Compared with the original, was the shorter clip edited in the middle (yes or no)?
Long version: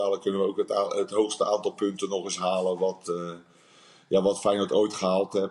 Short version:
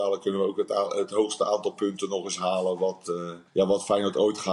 yes